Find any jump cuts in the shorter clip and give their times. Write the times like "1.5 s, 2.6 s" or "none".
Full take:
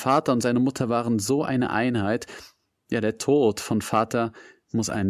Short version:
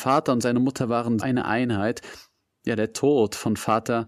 1.2 s